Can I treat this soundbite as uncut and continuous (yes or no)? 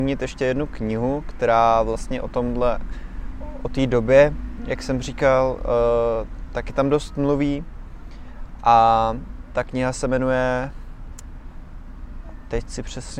yes